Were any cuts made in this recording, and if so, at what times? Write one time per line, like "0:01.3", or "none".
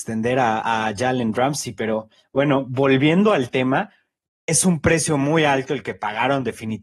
none